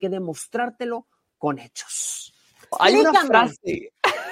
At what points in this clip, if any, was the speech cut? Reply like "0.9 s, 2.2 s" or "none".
2.7 s